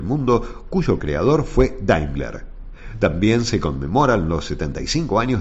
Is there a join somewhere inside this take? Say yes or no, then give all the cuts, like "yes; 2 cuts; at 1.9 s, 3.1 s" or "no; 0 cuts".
no; 0 cuts